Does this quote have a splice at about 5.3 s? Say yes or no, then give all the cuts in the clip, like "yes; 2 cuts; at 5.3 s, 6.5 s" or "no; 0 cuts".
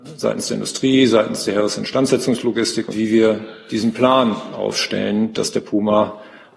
yes; 2 cuts; at 2.9 s, 5.3 s